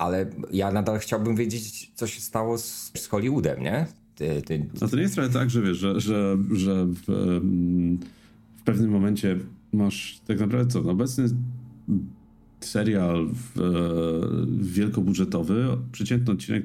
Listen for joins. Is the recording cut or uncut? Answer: cut